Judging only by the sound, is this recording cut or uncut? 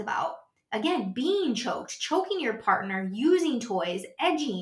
uncut